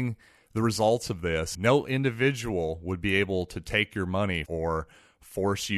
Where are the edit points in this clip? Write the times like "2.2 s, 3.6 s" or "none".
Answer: 1.5 s, 4.5 s